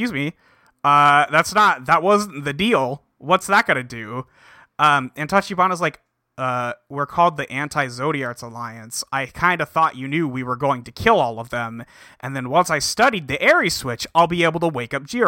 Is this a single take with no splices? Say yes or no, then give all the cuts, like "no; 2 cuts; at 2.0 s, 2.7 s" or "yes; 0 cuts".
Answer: yes; 0 cuts